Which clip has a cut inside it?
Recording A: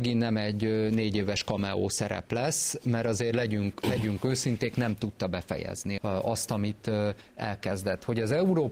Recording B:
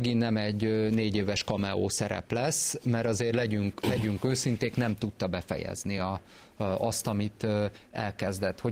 A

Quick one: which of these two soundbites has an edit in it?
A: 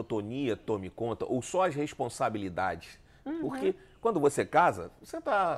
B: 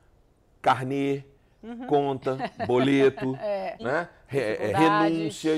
B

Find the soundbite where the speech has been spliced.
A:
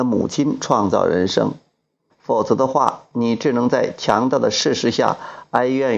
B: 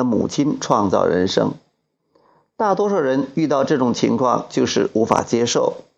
A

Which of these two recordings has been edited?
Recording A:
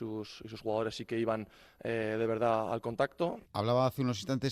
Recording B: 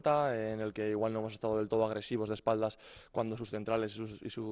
A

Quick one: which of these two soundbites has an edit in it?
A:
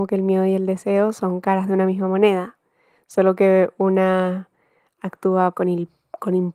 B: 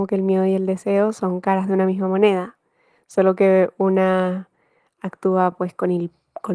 A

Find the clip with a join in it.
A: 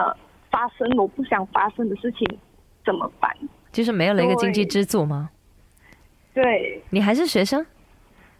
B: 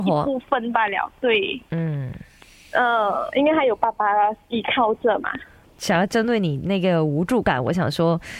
A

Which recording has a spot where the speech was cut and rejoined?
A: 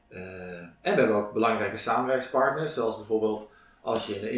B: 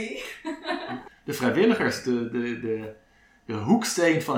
B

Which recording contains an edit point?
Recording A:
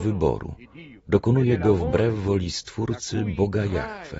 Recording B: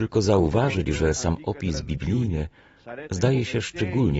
A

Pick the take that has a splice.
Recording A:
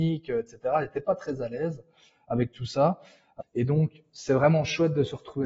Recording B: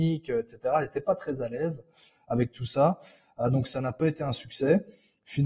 A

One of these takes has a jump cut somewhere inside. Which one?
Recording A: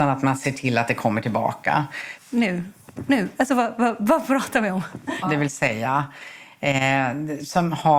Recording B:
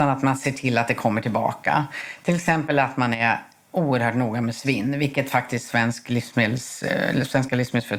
A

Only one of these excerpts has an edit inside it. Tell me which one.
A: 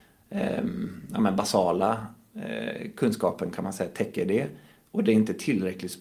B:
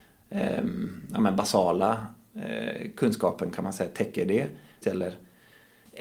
B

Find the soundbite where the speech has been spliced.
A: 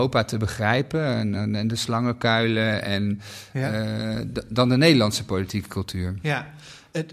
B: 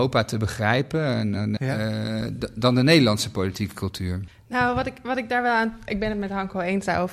B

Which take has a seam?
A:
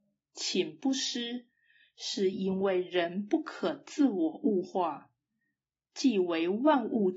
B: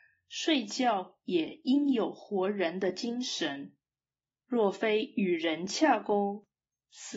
B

